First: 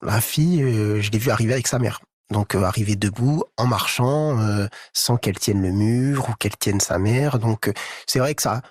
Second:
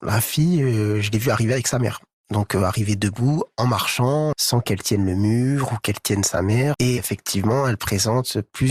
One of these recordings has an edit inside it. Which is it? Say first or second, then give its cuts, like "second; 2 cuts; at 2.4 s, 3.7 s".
second; 2 cuts; at 4.3 s, 6.7 s